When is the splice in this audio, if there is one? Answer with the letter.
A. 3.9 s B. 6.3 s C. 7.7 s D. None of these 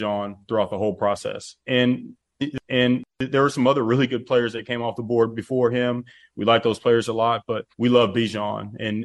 C